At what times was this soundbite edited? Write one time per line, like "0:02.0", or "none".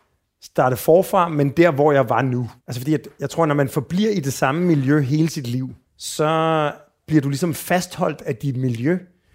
0:02.6
0:05.8